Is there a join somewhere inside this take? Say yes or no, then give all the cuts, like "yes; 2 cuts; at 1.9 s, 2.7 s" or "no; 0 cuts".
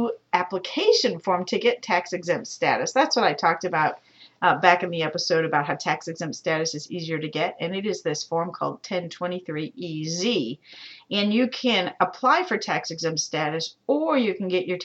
no; 0 cuts